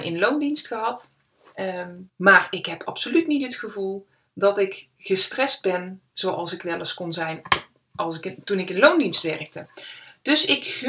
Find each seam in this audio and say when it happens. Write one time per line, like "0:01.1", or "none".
0:02.1